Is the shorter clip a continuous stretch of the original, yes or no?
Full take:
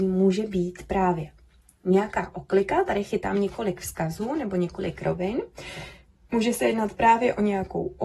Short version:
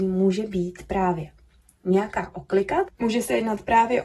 no